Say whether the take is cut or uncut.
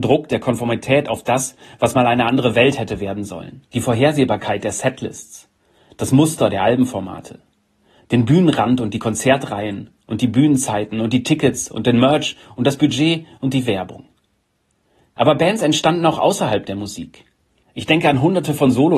cut